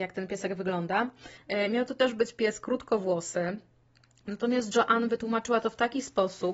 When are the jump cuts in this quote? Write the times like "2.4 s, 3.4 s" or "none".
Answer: 1.4 s